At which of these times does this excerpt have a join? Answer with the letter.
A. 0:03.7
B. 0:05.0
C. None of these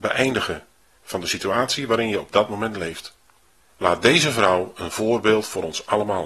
A